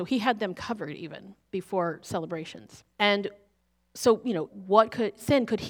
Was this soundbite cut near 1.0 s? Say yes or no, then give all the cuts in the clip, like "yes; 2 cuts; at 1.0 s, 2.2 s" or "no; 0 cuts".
no; 2 cuts; at 2.9 s, 4.5 s